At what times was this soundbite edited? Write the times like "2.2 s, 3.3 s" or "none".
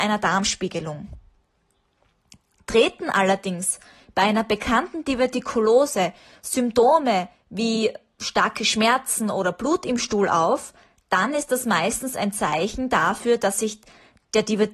none

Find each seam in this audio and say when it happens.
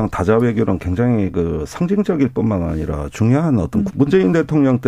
3.9 s

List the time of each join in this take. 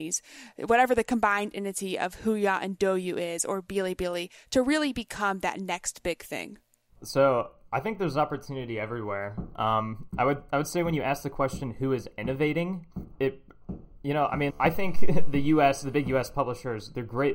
14.5 s

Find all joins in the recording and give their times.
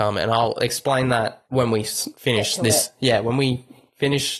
none

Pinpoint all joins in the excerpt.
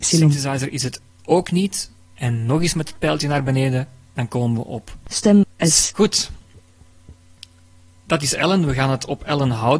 5.9 s

